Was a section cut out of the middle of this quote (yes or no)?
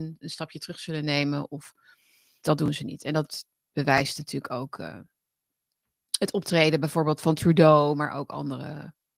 yes